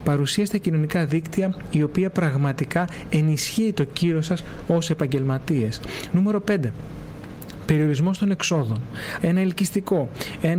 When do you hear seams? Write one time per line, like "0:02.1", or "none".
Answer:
0:09.2